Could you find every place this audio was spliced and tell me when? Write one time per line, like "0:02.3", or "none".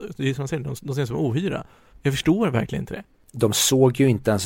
0:01.9